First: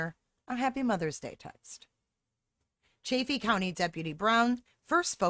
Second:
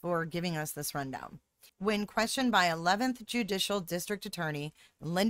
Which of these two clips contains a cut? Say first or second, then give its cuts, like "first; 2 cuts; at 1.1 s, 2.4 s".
second; 1 cut; at 1.7 s